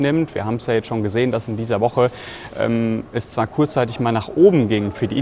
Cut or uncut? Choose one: uncut